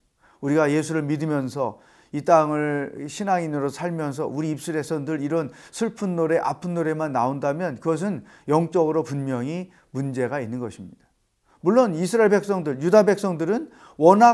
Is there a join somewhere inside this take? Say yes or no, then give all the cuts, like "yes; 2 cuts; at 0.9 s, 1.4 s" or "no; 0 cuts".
no; 0 cuts